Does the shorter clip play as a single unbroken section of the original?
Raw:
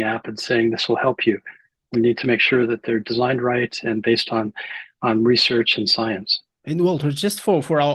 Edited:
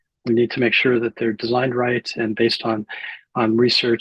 yes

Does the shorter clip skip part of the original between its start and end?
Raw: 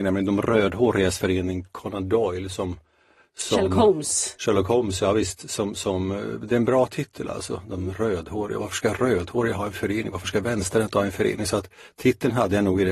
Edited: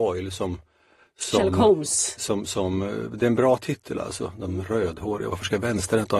yes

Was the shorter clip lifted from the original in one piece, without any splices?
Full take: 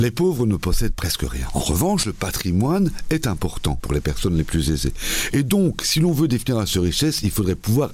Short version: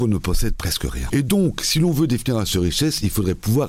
no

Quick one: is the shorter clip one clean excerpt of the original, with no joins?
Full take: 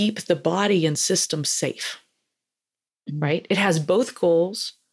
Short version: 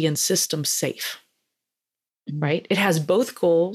yes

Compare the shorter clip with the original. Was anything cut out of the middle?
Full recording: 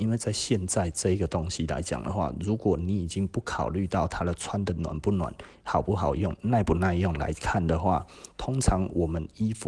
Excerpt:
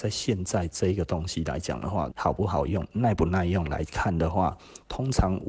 yes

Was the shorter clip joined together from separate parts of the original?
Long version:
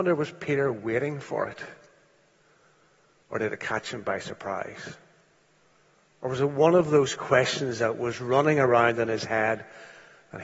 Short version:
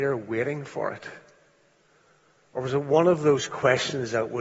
yes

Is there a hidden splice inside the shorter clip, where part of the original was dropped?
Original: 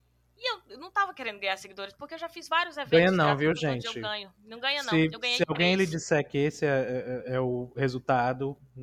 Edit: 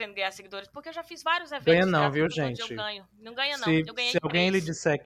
no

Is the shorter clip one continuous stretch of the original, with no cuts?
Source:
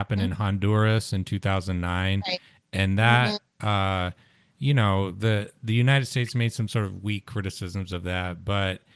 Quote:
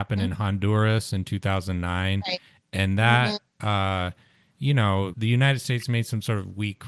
no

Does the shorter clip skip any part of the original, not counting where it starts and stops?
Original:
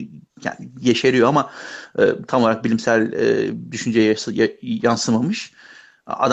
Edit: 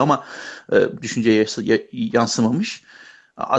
yes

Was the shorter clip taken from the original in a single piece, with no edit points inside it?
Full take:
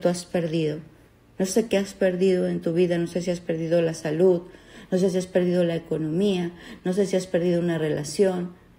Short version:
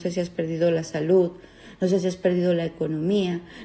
yes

